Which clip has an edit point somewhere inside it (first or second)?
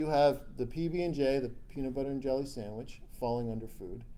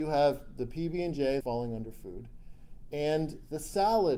second